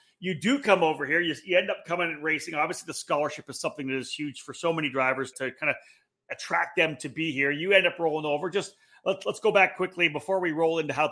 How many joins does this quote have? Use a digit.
1